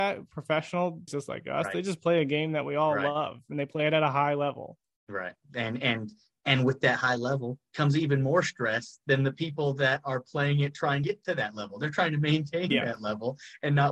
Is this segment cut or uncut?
cut